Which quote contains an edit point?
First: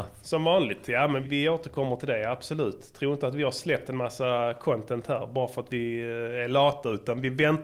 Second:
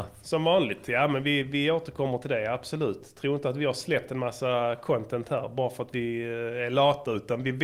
first; 1 cut; at 1.2 s

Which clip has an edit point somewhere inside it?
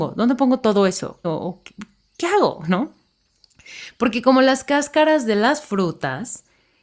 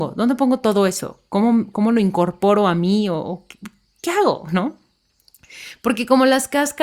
first; 1 cut; at 1.2 s

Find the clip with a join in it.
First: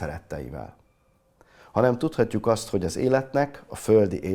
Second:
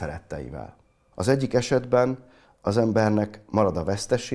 second; 1 cut; at 1.1 s

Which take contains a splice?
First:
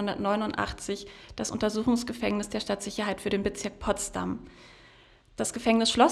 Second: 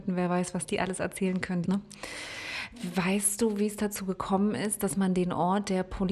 second; 1 cut; at 1.6 s

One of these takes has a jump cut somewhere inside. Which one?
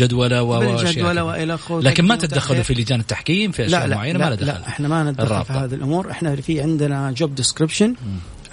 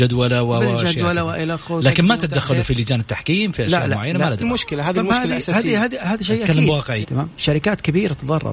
second; 2 cuts; at 4.4 s, 7.0 s

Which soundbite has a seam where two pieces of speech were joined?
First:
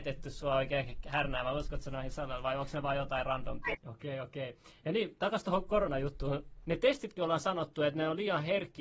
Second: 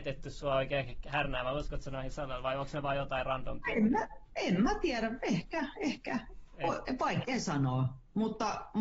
first; 2 cuts; at 3.7 s, 6.7 s

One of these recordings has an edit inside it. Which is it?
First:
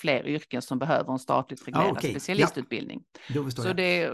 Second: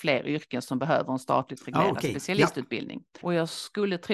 second; 1 cut; at 3.2 s

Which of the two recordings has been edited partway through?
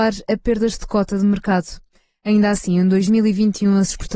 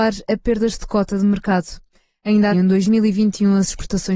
second; 1 cut; at 2.5 s

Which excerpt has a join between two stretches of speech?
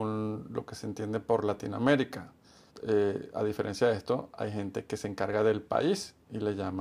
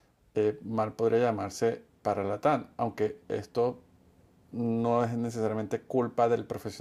first; 1 cut; at 2.7 s

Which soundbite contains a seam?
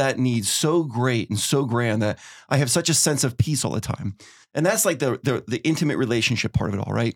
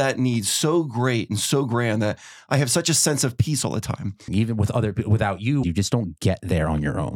second; 2 cuts; at 4.3 s, 5.6 s

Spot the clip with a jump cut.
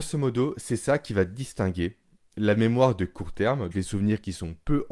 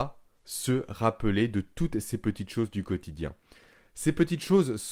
first; 1 cut; at 3.7 s

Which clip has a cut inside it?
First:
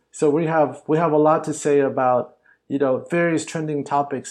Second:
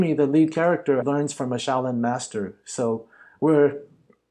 second; 1 cut; at 1.0 s

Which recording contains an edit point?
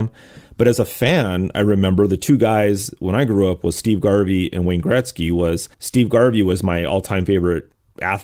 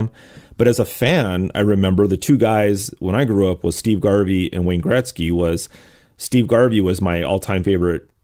first; 1 cut; at 5.7 s

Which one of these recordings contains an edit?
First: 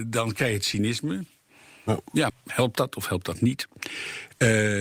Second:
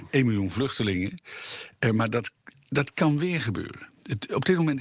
first; 1 cut; at 2.3 s

